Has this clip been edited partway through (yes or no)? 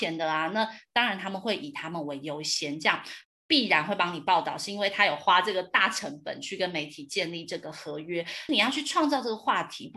yes